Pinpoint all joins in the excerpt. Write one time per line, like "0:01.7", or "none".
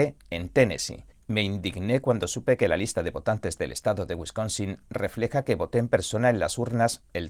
0:01.1